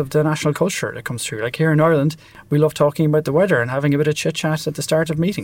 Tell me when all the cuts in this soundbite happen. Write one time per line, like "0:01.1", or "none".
none